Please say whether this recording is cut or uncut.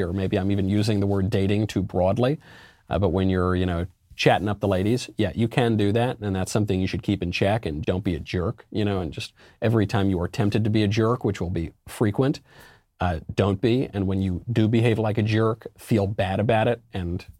cut